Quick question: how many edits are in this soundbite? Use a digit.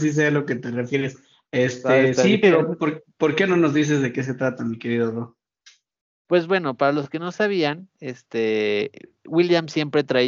1